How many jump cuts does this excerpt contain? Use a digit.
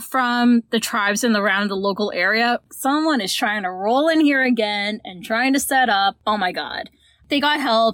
1